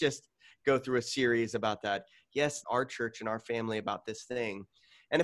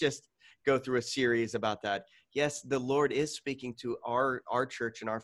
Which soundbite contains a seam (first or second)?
first